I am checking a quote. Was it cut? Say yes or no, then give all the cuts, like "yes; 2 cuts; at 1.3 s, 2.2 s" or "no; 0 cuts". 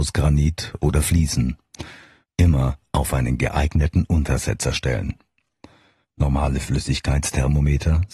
yes; 2 cuts; at 2.2 s, 6.0 s